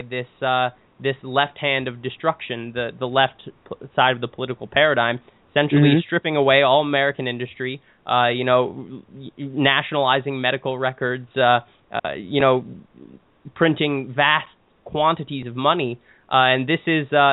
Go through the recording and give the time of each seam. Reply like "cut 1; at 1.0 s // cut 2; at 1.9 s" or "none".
none